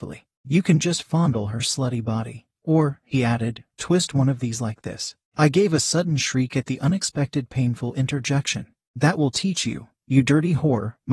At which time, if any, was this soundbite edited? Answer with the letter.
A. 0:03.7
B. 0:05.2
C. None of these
A